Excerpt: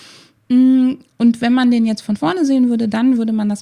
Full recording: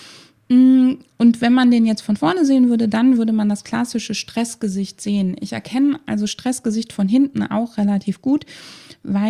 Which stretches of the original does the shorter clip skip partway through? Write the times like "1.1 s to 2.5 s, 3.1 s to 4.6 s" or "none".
none